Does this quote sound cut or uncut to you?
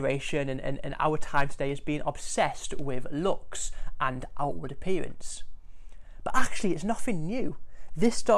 uncut